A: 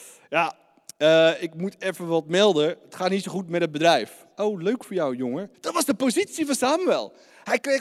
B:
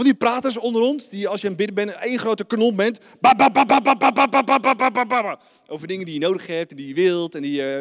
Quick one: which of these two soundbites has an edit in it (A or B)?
A